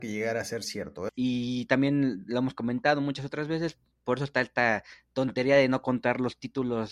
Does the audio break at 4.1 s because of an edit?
no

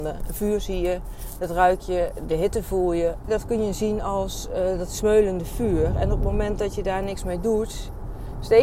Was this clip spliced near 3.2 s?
yes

